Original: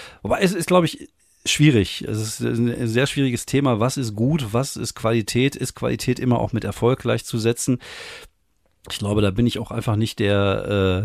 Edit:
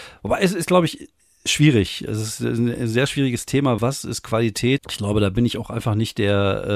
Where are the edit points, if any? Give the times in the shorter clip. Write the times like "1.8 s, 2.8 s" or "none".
3.8 s, 4.8 s